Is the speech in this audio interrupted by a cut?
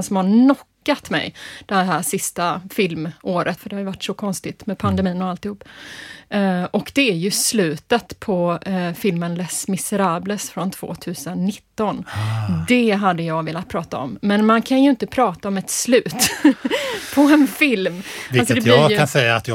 yes; 1 cut; at 3.6 s

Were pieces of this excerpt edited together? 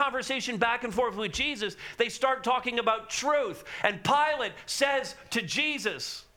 no; 0 cuts

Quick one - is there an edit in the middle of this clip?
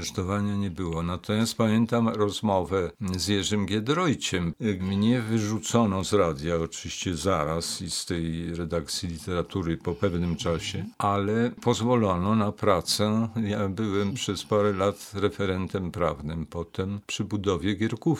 yes; 1 cut; at 4.8 s

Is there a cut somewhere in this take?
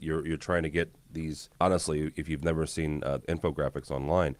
yes; 2 cuts; at 1.5 s, 3.2 s

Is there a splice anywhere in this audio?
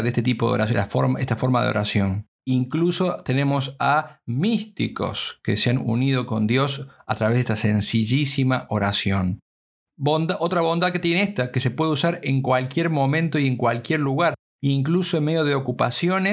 yes; 1 cut; at 2.3 s

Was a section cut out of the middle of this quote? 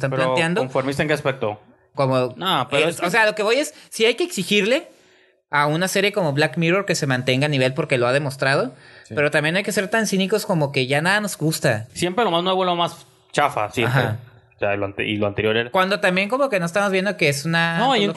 yes; 2 cuts; at 1.9 s, 11.9 s

